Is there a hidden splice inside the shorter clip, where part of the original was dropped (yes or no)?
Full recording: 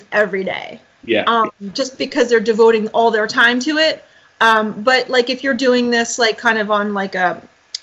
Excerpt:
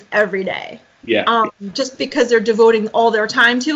no